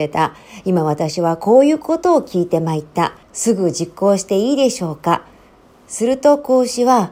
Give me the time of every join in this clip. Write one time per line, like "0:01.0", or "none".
0:03.2